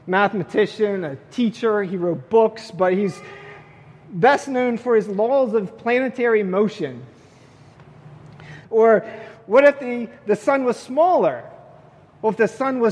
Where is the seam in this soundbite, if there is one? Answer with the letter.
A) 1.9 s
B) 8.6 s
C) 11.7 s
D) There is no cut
B